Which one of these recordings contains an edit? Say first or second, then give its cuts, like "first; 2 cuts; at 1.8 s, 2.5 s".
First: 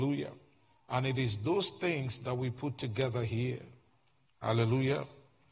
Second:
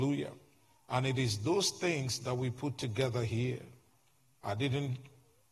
first; 1 cut; at 4.3 s